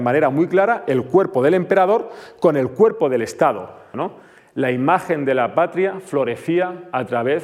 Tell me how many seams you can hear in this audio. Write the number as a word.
one